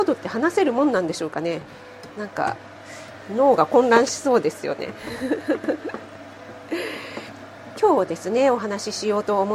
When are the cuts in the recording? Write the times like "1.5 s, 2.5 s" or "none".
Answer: none